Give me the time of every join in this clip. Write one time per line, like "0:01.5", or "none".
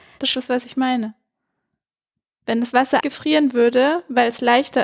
0:03.0